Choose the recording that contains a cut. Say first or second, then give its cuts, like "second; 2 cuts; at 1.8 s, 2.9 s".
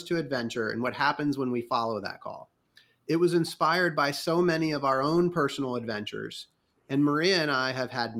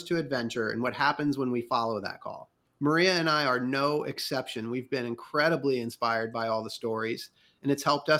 second; 1 cut; at 2.7 s